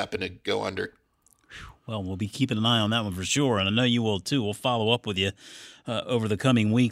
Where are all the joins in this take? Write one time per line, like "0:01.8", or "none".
none